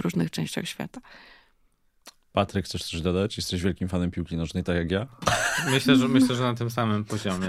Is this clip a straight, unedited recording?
yes; 0 cuts

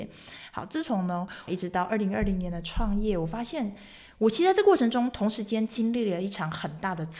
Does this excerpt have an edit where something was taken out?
yes; 1 cut; at 1.5 s

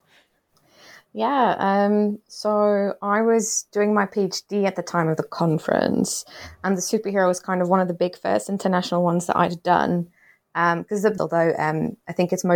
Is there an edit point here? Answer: yes; 1 cut; at 11.2 s

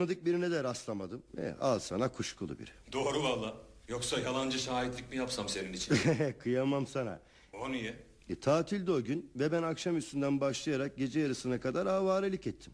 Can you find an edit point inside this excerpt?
yes; 1 cut; at 7.5 s

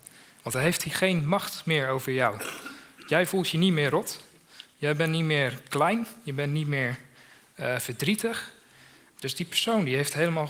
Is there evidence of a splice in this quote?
no; 0 cuts

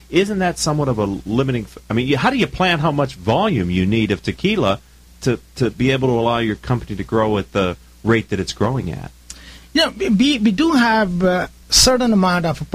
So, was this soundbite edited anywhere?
no; 0 cuts

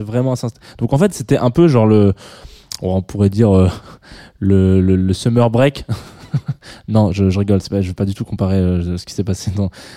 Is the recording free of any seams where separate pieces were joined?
yes; 0 cuts

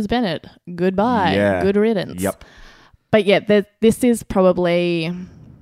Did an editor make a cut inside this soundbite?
no; 0 cuts

